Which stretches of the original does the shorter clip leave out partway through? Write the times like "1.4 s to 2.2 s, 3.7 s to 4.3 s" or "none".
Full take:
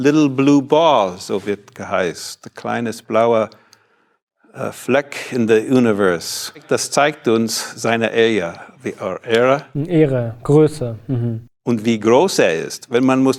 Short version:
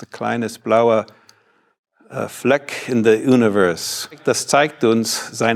none